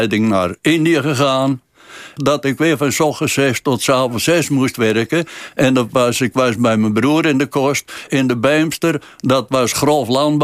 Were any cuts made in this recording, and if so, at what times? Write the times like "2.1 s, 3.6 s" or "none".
2.2 s, 8.1 s